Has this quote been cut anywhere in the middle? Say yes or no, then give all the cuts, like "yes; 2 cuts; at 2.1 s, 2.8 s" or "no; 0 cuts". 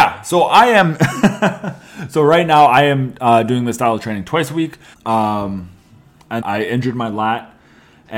yes; 2 cuts; at 4.9 s, 6.4 s